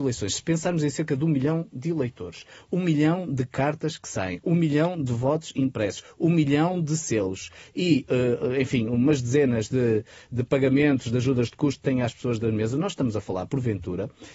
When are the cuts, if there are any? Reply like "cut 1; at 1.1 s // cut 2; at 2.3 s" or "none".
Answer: none